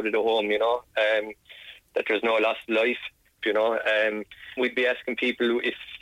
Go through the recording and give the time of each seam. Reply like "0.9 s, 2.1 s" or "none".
3.4 s, 4.6 s